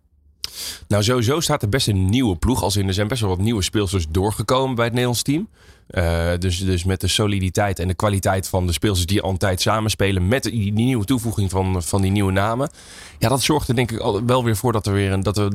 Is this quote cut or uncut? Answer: cut